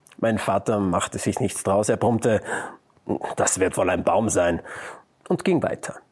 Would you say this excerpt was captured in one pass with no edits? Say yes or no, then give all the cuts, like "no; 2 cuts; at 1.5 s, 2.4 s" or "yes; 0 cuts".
yes; 0 cuts